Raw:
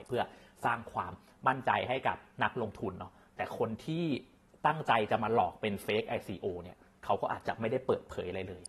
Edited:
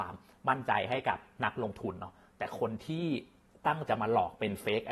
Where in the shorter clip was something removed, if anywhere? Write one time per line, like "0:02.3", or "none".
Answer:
0:03.9